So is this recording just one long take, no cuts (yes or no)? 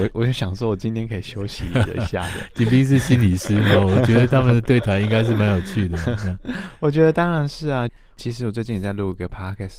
yes